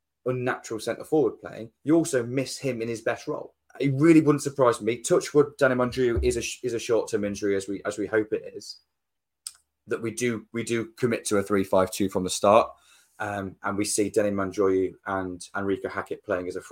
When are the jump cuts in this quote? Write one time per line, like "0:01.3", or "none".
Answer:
0:03.7